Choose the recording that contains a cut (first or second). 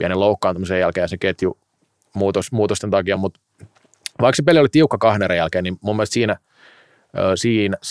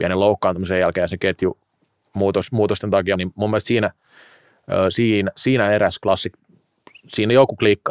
second